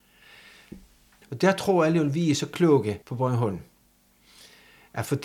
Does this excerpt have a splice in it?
yes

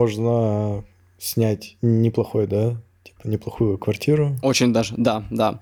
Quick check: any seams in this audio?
no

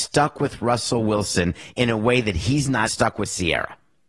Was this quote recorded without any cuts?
no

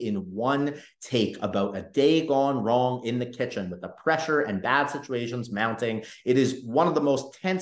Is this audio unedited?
yes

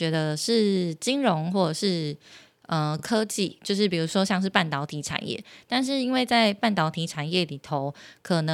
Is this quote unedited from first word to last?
yes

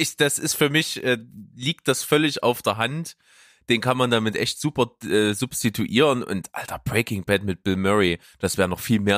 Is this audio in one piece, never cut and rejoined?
yes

